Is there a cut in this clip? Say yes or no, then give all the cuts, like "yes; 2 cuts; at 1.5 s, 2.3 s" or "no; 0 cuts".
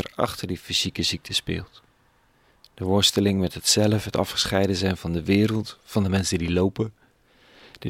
no; 0 cuts